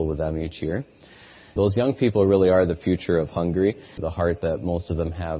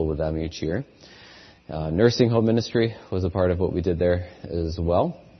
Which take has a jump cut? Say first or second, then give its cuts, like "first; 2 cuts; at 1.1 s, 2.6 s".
first; 2 cuts; at 1.6 s, 4.0 s